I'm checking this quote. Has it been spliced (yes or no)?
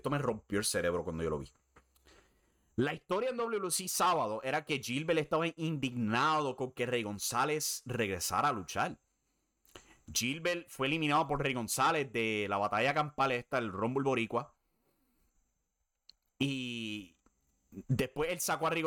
no